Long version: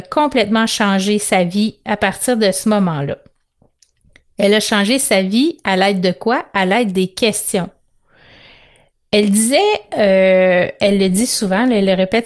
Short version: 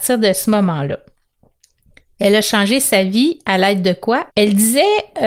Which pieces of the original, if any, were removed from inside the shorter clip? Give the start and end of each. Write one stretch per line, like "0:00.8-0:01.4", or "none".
0:06.5-0:09.1